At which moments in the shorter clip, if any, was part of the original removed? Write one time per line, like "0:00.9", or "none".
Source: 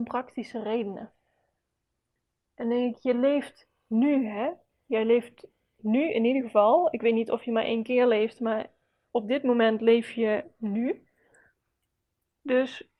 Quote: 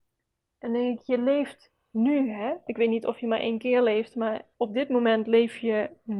0:02.7
0:04.5

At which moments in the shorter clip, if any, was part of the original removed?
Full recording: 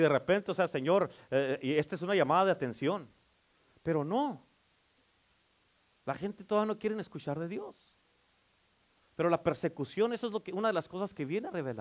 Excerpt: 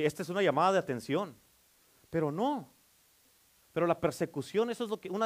0:03.6

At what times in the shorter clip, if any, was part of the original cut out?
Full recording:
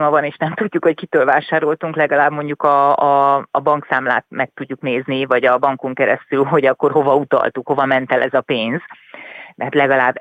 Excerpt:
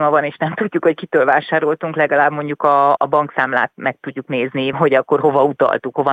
0:03.0
0:04.7

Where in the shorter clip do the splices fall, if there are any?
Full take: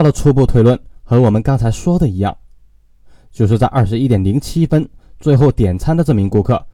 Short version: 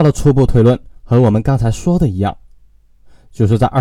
none

